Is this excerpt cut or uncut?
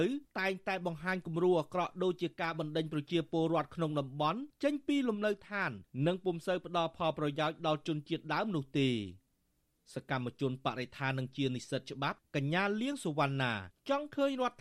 uncut